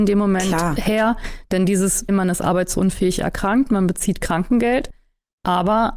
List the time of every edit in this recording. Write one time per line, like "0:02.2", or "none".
0:02.1